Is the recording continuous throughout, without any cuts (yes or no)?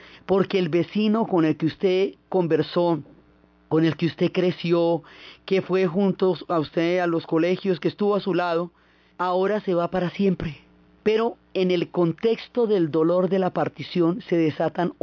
yes